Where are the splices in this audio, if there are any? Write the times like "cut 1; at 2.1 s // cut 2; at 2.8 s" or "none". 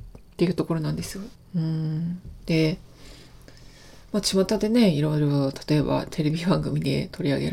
cut 1; at 1.3 s